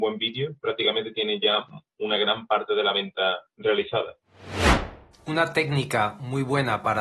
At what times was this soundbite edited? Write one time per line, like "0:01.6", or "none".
0:05.2